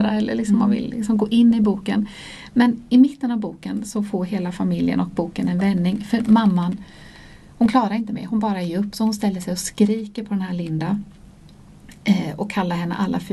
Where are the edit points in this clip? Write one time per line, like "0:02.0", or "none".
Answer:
none